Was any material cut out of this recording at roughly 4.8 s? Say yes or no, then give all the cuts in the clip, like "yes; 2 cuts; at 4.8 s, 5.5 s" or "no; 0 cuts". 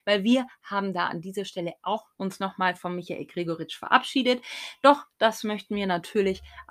no; 1 cut; at 2.1 s